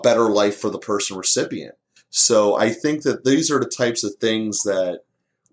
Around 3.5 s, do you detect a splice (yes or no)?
no